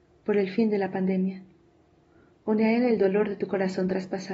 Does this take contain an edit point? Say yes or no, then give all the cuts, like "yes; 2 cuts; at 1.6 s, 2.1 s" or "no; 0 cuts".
no; 0 cuts